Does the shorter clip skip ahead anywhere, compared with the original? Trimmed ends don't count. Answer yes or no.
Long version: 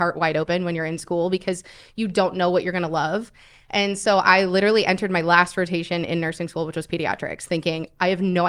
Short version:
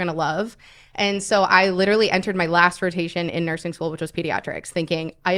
no